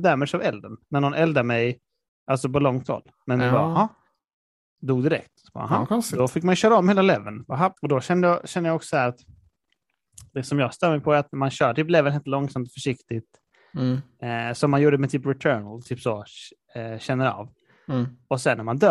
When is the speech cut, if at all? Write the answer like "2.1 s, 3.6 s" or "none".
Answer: 7.8 s